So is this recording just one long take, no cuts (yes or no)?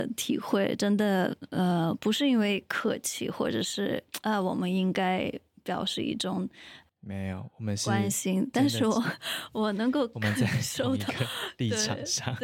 yes